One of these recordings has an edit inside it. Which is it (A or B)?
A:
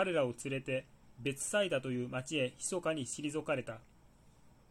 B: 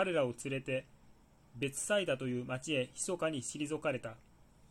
A